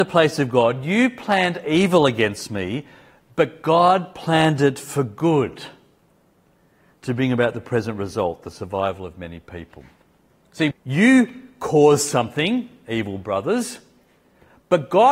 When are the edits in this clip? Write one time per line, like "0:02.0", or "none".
0:10.7